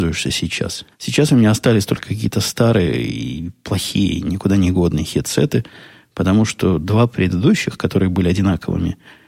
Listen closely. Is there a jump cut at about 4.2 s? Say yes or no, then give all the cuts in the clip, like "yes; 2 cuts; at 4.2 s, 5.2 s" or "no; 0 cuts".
no; 1 cut; at 0.9 s